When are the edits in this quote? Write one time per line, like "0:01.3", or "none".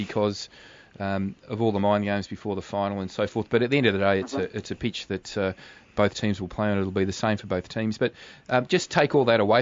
none